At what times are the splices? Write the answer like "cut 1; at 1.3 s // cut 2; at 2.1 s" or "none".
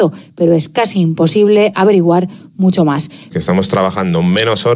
cut 1; at 3.3 s